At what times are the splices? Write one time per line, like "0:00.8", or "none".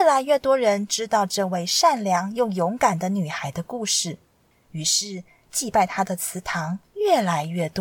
none